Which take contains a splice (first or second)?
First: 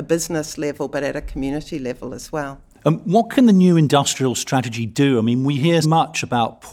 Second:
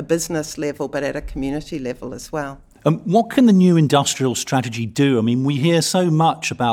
first